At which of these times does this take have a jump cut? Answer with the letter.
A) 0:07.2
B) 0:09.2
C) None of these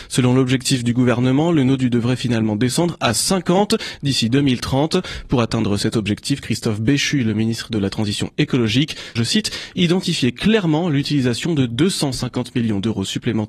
B